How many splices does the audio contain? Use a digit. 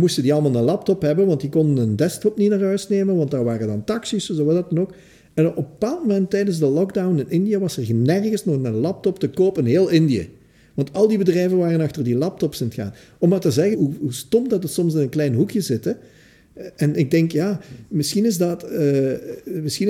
1